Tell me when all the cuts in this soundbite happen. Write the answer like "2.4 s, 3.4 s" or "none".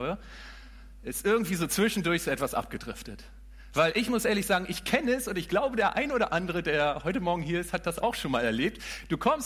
none